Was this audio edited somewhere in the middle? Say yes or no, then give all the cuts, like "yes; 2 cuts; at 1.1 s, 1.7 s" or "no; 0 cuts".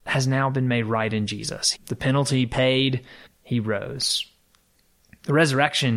yes; 2 cuts; at 1.7 s, 3.3 s